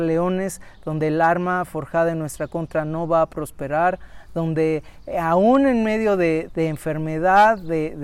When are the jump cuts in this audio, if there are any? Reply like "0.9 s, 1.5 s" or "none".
6.5 s